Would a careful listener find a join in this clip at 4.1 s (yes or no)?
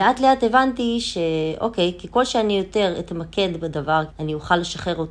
yes